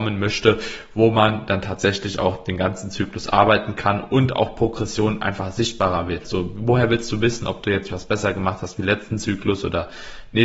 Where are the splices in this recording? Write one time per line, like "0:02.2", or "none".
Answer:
0:06.3
0:07.9

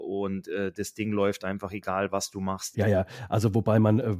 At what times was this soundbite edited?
0:02.7

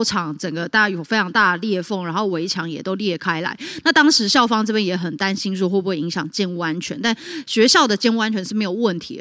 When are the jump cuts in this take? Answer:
none

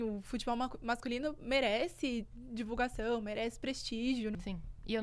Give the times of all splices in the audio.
none

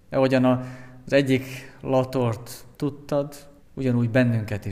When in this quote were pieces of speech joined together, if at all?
0:03.6

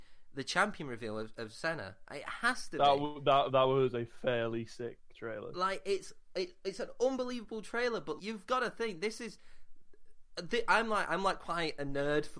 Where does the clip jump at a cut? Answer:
0:08.2

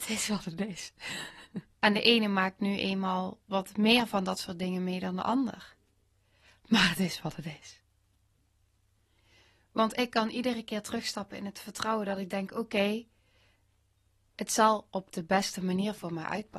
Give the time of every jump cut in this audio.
0:01.8

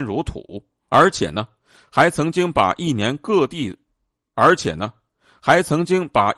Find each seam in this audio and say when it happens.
none

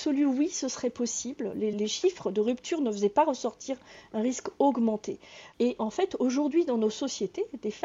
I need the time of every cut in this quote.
0:01.7
0:05.5

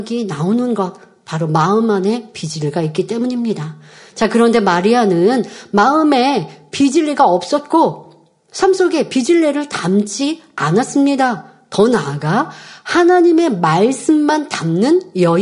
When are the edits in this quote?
none

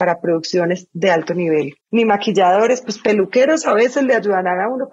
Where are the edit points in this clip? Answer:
0:01.8

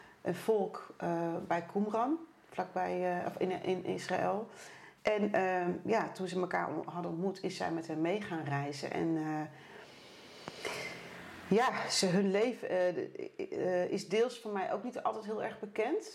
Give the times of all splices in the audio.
0:05.0

